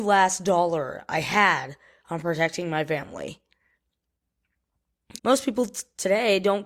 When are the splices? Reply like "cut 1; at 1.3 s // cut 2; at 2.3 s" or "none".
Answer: cut 1; at 5.2 s